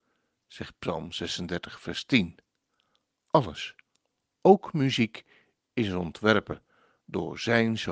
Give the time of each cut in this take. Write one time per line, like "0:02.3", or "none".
none